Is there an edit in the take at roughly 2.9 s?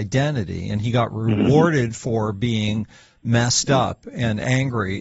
no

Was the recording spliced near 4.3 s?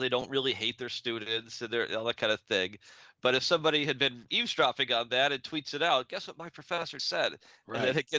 yes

